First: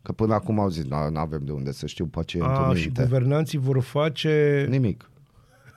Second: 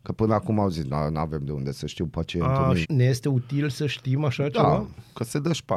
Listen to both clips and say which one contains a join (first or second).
second